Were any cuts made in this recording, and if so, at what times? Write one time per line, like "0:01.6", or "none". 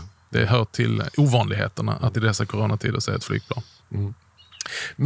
none

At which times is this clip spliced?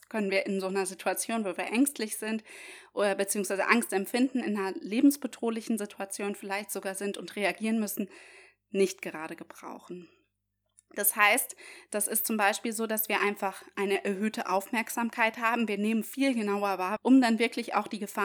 0:17.0

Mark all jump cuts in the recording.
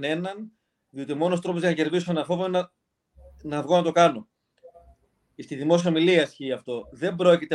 none

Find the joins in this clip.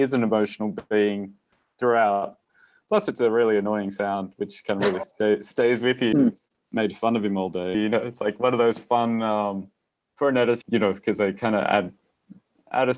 0:06.1
0:07.7
0:10.6

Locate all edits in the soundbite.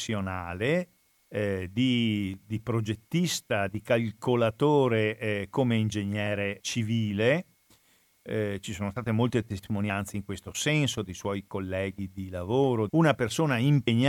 0:06.6
0:12.9

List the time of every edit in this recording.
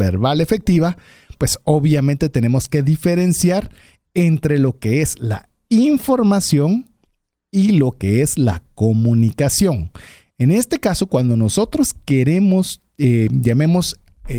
none

